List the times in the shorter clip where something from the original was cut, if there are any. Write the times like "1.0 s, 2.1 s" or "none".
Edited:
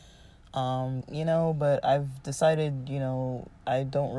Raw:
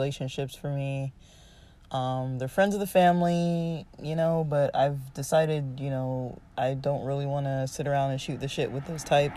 1.0 s